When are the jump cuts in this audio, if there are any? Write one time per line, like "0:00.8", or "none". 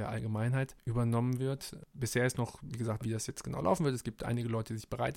0:03.0